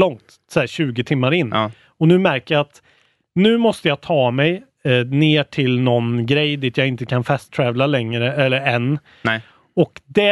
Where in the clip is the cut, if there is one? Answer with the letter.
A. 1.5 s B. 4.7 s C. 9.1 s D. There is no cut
D